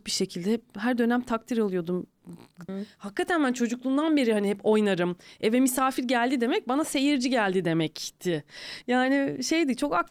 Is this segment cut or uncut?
cut